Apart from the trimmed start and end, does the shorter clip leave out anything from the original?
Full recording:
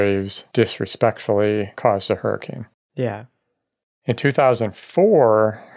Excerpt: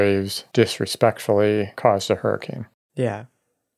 no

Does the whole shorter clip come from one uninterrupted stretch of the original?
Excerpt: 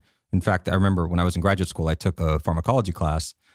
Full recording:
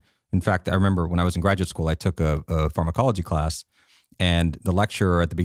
no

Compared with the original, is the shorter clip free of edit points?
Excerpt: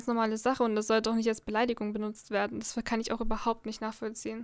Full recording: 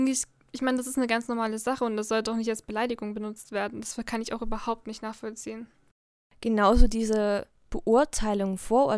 yes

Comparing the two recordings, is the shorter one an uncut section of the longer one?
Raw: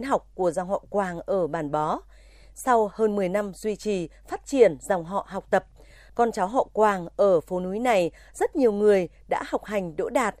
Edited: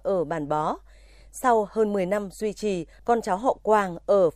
no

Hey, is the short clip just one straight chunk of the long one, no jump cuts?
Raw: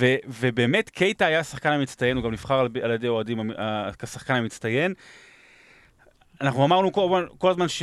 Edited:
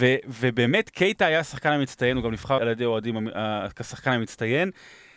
no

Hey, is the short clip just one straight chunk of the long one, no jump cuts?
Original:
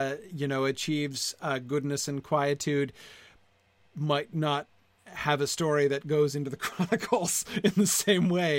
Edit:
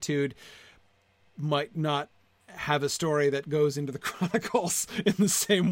yes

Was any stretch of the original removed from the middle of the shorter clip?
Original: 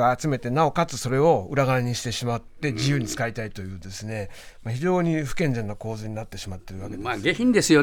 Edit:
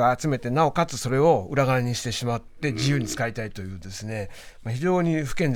no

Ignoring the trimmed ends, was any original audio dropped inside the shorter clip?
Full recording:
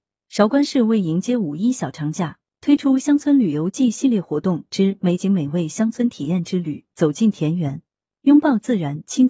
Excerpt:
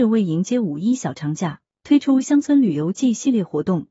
no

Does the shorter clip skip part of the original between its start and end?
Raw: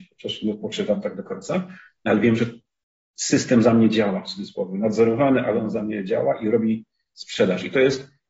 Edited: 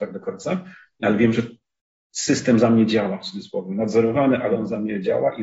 no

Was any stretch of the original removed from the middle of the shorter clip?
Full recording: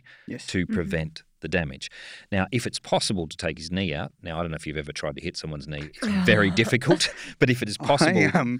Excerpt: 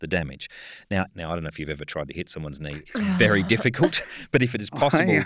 yes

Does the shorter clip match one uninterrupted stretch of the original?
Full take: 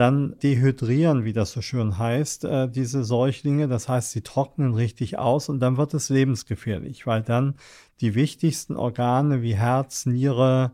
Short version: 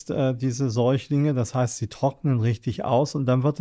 yes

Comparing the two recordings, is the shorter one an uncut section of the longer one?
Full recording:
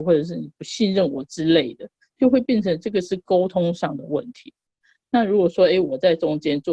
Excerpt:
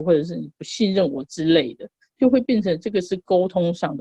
yes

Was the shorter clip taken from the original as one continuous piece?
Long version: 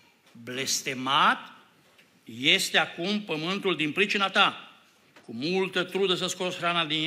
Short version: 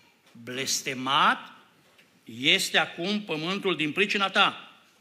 yes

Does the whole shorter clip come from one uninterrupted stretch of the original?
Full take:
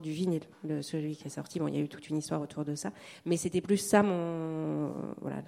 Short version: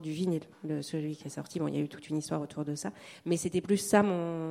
yes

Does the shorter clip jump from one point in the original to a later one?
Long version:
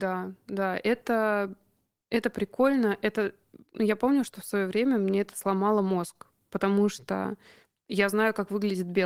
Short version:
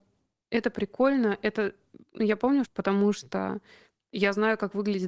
yes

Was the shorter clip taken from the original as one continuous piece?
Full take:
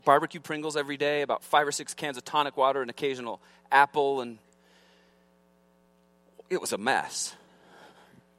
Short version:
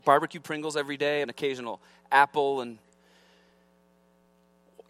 no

